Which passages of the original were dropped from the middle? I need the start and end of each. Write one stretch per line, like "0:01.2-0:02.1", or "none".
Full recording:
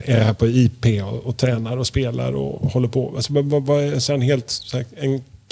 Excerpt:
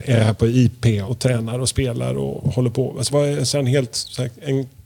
0:01.1-0:01.2
0:03.3-0:03.6